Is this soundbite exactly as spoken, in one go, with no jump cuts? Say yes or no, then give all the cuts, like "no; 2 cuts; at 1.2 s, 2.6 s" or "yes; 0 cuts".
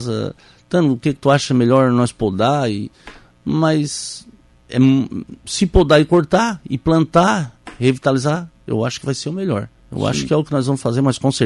no; 1 cut; at 9.8 s